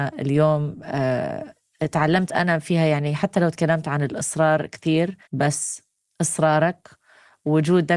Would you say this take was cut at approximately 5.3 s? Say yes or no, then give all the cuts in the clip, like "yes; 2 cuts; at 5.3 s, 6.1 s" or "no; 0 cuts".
yes; 1 cut; at 5.3 s